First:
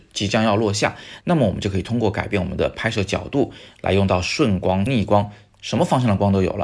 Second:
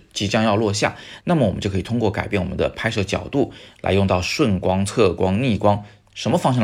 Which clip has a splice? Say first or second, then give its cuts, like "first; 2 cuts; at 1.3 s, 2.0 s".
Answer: first; 1 cut; at 4.9 s